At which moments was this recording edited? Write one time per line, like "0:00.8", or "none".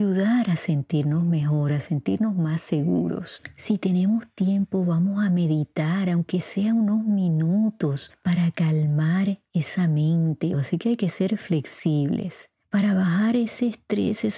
0:10.5